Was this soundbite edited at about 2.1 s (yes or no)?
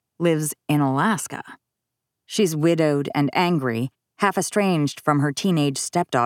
yes